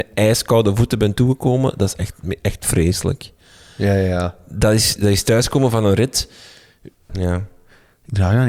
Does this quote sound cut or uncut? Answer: cut